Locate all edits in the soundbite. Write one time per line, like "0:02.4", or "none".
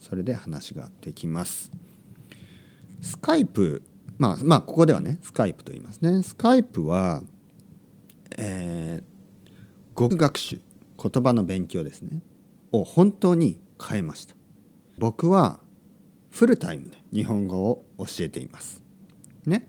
0:10.1
0:15.0
0:17.1

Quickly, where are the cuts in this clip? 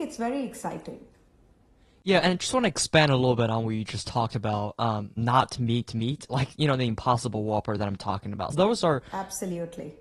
0:05.2
0:08.5

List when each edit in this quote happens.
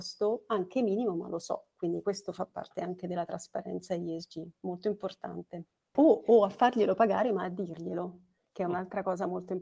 0:06.0

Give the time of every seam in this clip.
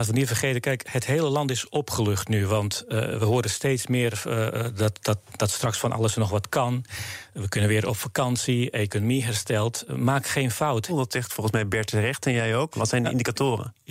0:10.9
0:12.7

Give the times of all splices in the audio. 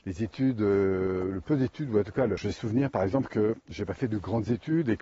0:02.4

